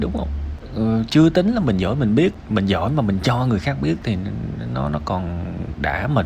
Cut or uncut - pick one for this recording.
uncut